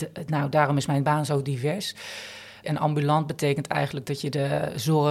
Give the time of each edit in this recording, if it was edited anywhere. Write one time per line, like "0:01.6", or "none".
0:02.6